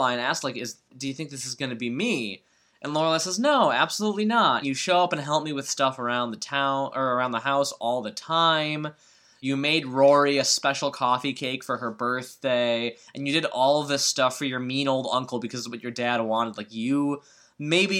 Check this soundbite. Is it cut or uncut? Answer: cut